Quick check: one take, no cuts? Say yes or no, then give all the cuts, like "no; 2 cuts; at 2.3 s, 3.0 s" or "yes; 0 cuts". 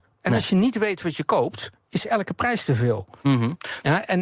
yes; 0 cuts